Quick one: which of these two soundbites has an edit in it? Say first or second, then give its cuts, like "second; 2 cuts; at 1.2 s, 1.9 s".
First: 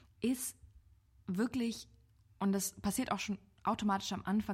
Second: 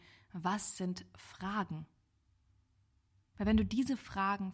second; 1 cut; at 3.3 s